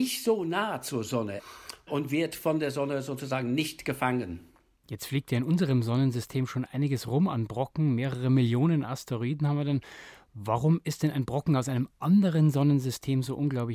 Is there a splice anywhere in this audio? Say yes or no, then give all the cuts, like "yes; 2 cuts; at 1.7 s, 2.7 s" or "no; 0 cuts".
no; 0 cuts